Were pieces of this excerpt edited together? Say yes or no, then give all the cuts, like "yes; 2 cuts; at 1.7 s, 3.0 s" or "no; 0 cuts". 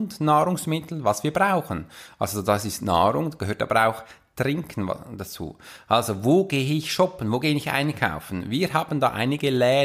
no; 0 cuts